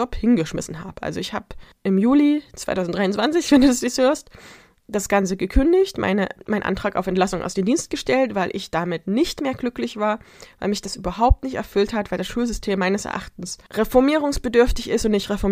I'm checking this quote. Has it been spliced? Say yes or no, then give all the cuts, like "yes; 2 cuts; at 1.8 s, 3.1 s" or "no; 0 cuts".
no; 0 cuts